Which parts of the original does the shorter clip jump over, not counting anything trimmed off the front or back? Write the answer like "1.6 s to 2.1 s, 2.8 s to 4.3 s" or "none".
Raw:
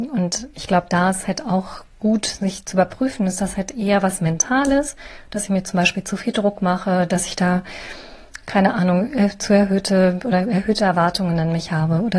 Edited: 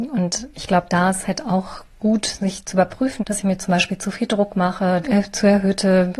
3.2 s to 5.3 s, 7.1 s to 9.1 s